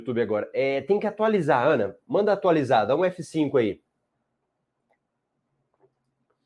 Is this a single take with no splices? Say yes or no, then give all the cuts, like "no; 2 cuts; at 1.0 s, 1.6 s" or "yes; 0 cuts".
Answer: yes; 0 cuts